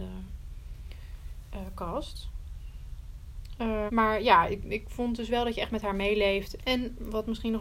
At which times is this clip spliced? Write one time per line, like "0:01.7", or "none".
0:03.9
0:06.6